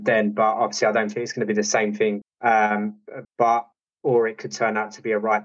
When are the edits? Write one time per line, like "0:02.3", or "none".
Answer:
0:02.2
0:03.2